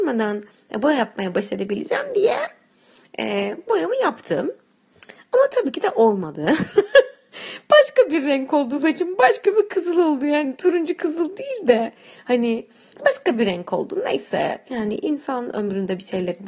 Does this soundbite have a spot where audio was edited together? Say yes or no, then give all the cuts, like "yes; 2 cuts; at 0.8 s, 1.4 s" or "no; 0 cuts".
no; 0 cuts